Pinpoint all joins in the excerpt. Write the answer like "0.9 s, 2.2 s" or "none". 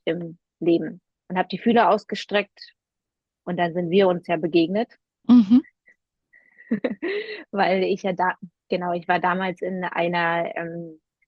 none